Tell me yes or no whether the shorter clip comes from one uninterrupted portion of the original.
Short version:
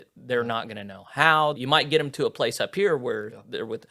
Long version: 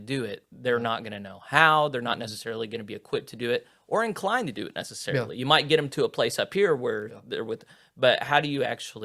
no